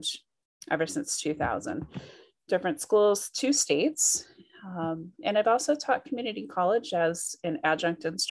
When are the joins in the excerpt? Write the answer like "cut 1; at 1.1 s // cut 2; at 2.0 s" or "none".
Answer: none